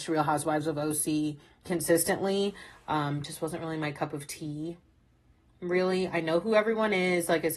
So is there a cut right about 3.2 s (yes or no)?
no